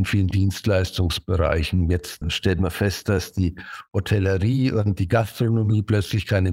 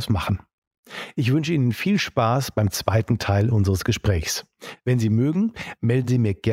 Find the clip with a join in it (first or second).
first